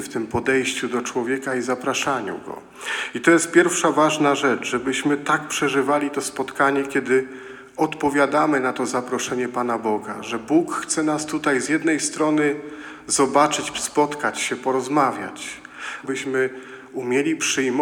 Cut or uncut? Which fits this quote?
cut